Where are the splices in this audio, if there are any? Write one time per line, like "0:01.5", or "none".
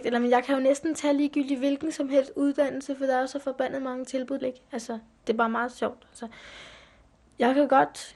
0:04.4